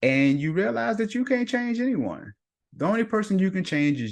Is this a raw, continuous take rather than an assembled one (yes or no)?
yes